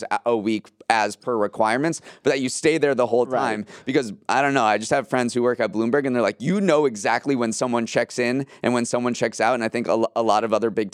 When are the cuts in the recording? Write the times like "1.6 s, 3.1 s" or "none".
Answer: none

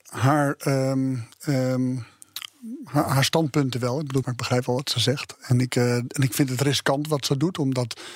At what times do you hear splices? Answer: 4.2 s

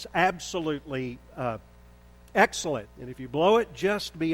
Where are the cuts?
2.8 s

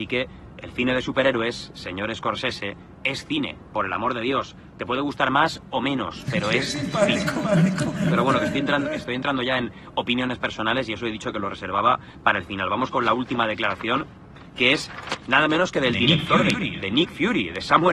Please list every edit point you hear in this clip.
16.5 s

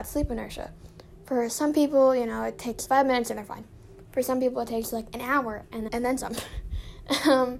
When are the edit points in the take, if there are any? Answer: 2.9 s, 5.9 s

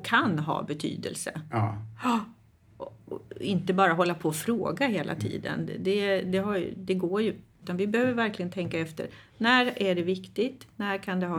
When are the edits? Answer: 7.6 s

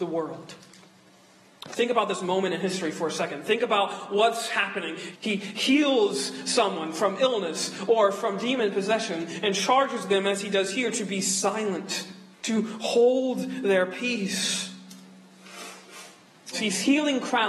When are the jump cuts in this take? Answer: 5.1 s, 12.3 s, 16.5 s

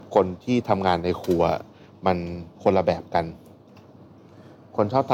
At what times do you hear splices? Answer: 2.5 s

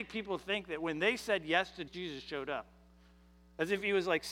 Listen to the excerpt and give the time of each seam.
1.9 s

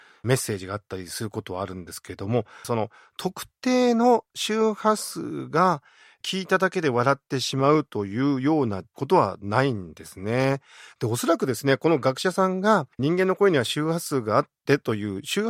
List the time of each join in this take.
2.6 s, 12.9 s

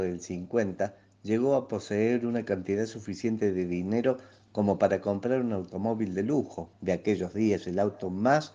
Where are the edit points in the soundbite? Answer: 6.7 s

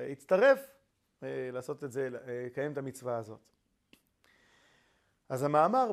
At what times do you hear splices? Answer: none

